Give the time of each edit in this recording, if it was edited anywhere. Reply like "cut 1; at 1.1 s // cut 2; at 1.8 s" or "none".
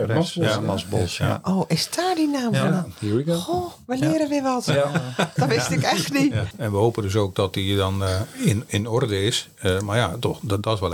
cut 1; at 5.4 s // cut 2; at 6.5 s